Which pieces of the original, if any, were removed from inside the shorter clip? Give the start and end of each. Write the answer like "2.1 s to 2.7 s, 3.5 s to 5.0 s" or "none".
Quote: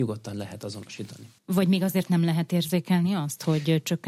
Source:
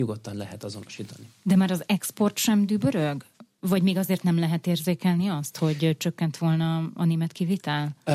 1.4 s to 3.5 s